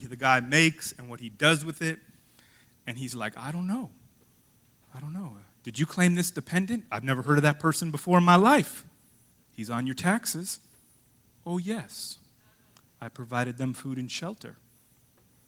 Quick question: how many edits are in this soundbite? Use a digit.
0